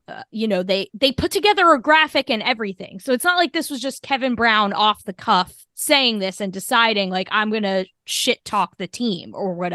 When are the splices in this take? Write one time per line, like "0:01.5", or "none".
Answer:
0:05.7